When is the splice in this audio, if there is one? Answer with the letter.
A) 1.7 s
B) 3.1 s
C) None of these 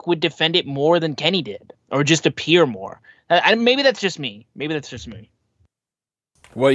A